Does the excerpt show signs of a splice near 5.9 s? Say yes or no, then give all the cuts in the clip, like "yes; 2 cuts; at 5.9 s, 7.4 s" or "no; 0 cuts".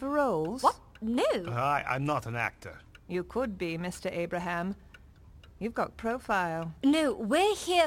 yes; 1 cut; at 5.9 s